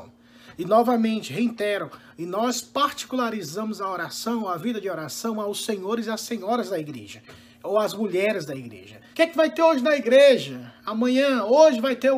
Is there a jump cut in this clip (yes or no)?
yes